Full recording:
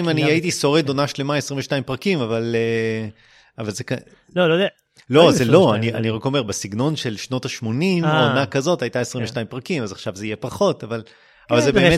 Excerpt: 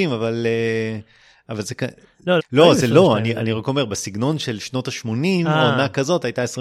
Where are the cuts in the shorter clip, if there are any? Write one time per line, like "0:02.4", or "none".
0:02.4